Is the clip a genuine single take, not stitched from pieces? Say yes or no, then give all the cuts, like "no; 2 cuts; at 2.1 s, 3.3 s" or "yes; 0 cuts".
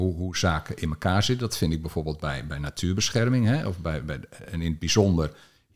yes; 0 cuts